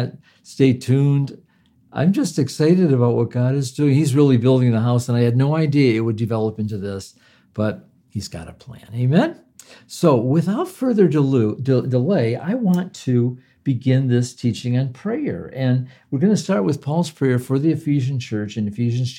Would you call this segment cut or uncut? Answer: uncut